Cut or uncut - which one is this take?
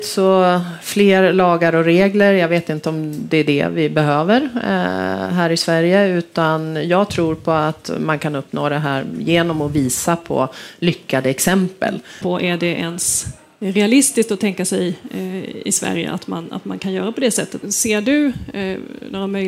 cut